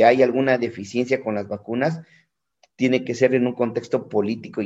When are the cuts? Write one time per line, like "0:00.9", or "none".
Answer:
none